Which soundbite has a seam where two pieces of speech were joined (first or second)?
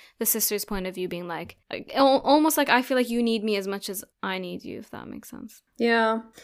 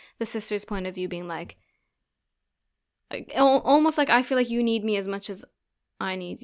first